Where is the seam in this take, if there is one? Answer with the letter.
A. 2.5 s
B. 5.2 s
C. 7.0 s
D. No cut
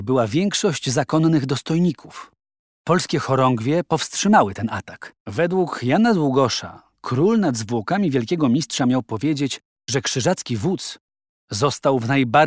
B